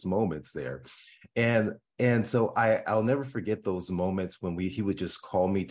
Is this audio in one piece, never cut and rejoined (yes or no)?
yes